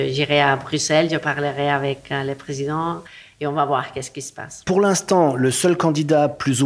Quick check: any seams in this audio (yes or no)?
no